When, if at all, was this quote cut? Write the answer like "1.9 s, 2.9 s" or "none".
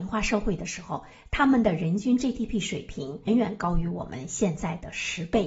3.3 s